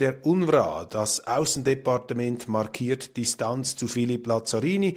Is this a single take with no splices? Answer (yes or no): yes